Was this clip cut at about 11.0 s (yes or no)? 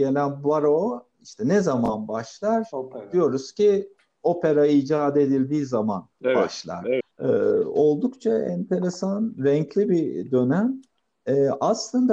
no